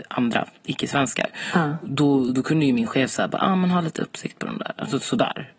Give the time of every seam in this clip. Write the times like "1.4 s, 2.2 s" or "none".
none